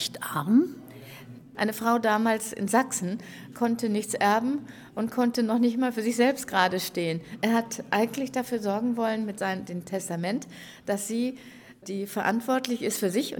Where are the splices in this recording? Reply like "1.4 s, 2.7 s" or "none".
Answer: 1.5 s